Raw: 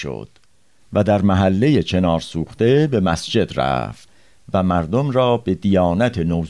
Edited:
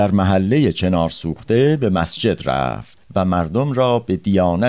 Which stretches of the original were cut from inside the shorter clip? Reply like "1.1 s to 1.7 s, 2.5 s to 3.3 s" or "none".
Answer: 4.1 s to 4.4 s